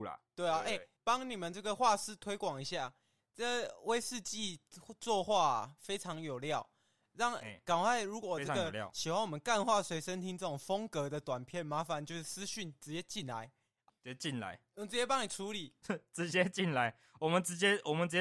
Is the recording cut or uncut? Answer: cut